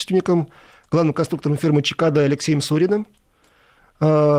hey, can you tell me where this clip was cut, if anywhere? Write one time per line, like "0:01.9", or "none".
none